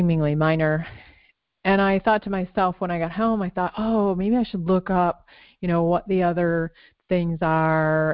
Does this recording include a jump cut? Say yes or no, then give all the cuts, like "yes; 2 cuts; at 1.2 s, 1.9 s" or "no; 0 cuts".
no; 0 cuts